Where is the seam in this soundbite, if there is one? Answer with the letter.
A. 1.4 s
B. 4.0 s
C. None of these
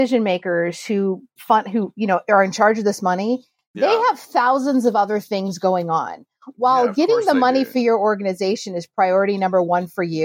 A